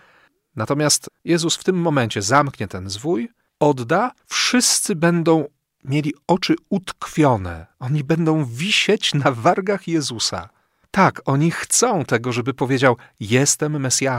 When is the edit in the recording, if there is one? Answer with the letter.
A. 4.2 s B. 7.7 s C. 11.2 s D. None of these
A